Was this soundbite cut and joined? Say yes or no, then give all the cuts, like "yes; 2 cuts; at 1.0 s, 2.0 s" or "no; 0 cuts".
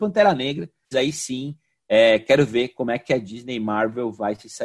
yes; 1 cut; at 0.9 s